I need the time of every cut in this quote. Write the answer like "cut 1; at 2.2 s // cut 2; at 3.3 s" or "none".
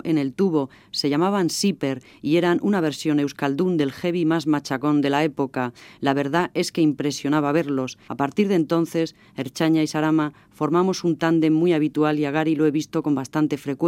cut 1; at 8.1 s